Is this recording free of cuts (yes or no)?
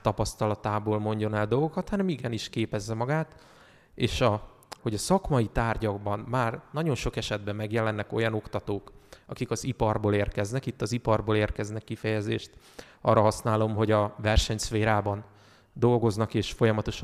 no